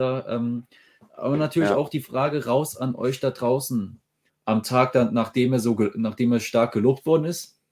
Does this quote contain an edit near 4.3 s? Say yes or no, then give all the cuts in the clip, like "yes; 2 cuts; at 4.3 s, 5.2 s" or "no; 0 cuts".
yes; 1 cut; at 4.3 s